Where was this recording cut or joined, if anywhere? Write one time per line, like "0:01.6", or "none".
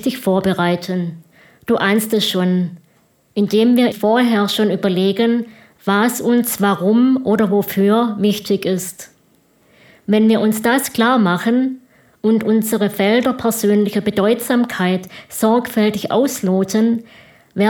0:03.9